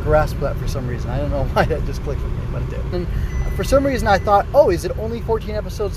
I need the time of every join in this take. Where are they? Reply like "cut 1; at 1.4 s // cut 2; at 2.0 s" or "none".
cut 1; at 2.9 s